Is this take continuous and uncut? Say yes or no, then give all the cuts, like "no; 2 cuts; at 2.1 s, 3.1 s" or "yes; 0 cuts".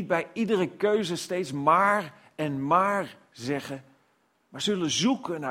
yes; 0 cuts